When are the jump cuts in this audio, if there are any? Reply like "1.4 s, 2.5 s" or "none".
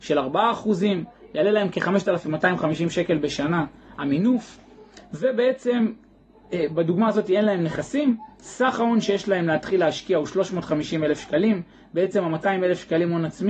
none